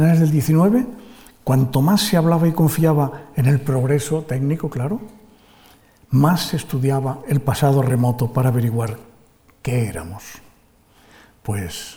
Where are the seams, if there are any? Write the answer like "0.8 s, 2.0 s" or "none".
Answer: none